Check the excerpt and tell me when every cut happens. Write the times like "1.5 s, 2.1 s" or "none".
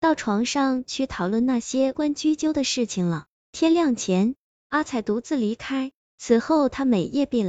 1.9 s